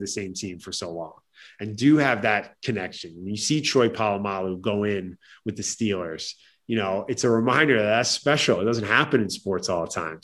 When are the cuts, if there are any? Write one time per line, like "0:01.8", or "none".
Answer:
none